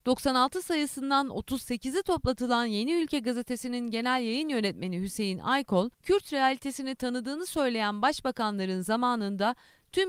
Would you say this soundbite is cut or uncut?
cut